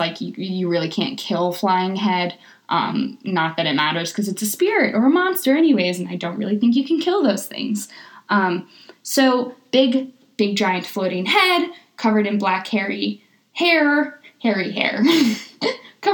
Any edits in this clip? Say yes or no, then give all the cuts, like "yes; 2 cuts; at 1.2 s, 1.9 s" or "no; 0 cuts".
no; 0 cuts